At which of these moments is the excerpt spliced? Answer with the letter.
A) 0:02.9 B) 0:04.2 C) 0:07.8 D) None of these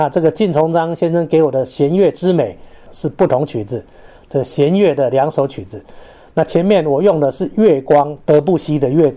A